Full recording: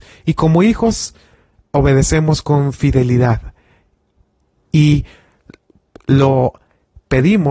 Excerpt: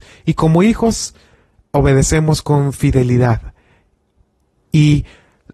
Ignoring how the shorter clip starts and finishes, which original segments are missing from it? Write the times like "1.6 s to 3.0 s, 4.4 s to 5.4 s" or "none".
none